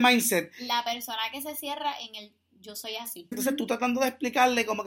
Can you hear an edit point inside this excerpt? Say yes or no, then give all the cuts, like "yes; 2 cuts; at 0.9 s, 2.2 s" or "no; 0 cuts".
yes; 1 cut; at 3.3 s